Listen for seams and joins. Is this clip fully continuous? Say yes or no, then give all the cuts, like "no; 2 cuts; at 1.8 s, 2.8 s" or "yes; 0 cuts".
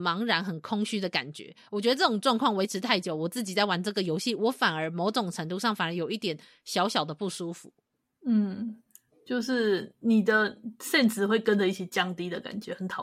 yes; 0 cuts